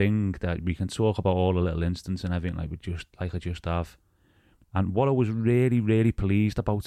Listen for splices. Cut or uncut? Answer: cut